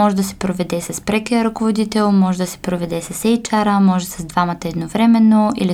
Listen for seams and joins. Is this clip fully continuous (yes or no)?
yes